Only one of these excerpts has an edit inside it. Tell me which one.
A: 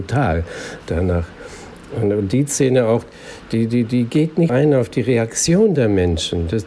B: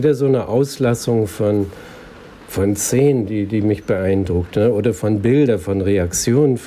A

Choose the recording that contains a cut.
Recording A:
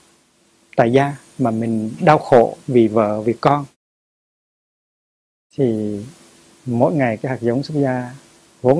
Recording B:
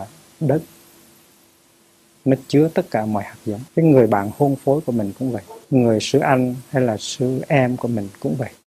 B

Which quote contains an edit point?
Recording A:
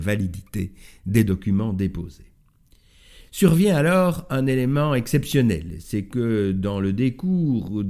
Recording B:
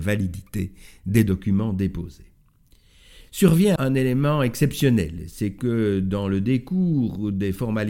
B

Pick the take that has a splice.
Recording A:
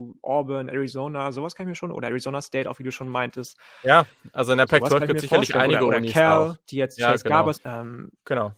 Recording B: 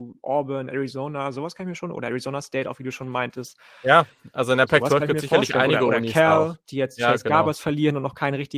A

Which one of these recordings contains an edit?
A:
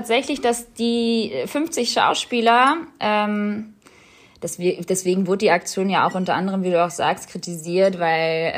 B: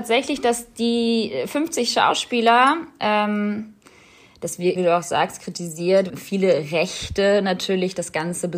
B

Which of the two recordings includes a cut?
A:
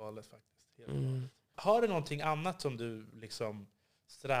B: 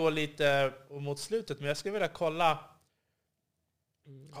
A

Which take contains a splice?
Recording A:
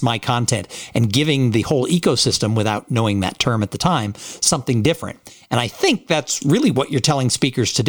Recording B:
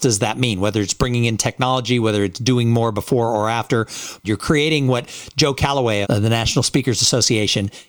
B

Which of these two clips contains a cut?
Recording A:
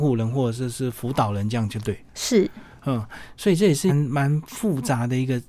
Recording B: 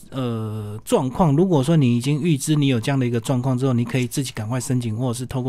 A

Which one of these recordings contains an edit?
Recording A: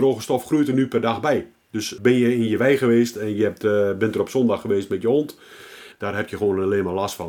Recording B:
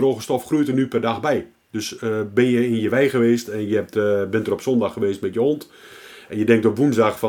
A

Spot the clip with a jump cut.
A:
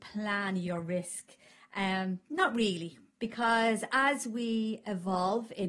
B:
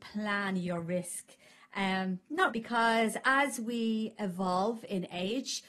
B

